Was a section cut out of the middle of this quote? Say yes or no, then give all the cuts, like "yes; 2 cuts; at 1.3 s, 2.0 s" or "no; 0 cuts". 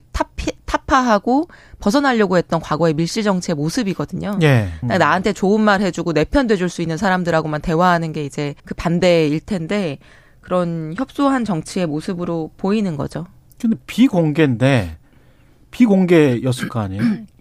yes; 2 cuts; at 4.8 s, 8.6 s